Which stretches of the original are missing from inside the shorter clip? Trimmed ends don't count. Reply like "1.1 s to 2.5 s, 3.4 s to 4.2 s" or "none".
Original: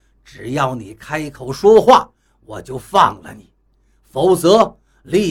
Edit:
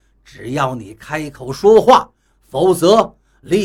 2.3 s to 3.9 s